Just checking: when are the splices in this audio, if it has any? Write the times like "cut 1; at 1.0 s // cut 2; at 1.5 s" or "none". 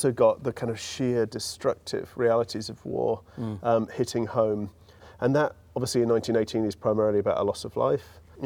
none